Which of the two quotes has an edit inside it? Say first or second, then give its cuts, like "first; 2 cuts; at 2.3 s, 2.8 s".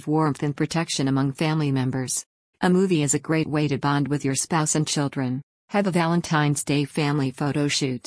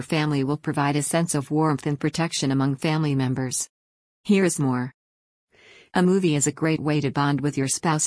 first; 2 cuts; at 2.5 s, 5.6 s